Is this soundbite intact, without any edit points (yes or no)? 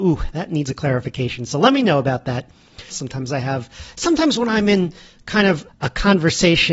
no